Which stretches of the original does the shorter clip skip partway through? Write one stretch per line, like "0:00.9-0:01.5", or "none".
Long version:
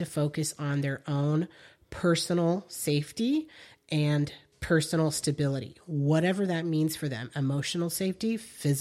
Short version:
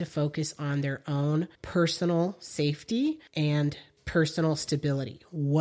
0:01.5-0:01.8
0:03.6-0:03.8